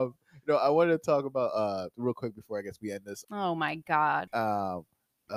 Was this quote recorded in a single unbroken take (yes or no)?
no